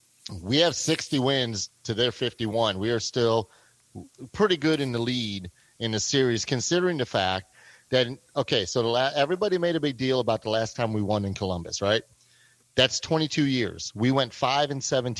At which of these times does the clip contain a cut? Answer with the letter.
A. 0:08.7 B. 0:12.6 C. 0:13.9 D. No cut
B